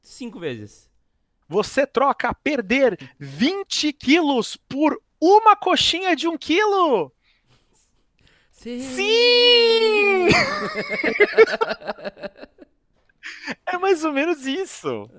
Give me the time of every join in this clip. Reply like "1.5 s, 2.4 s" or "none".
1.4 s